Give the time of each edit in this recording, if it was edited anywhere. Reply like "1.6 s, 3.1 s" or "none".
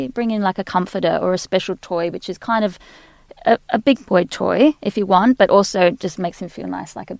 none